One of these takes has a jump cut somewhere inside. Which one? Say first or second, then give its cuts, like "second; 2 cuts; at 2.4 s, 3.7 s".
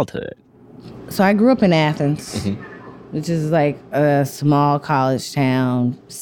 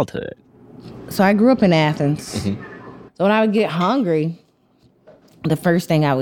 second; 1 cut; at 3.1 s